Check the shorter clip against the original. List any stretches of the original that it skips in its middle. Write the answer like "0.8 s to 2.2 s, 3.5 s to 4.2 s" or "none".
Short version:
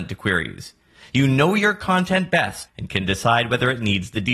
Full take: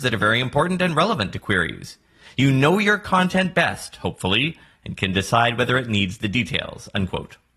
3.9 s to 4.7 s